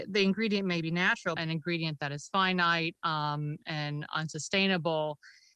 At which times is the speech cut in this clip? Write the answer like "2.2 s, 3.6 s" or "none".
1.4 s